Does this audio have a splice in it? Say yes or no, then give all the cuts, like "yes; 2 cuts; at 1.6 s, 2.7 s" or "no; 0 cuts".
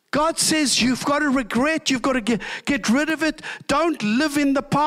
no; 0 cuts